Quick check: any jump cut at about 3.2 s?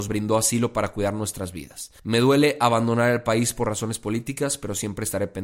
no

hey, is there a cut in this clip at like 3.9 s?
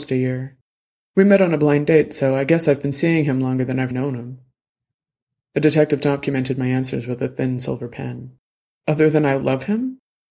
yes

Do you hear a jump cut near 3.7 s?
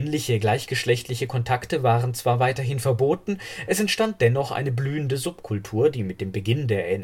no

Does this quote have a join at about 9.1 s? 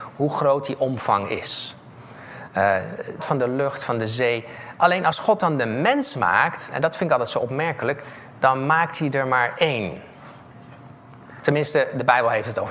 no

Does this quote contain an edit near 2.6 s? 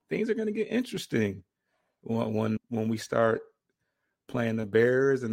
yes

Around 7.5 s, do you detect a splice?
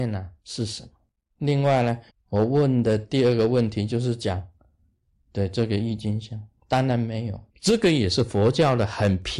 yes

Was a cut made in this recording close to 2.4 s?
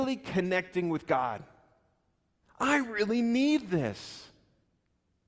yes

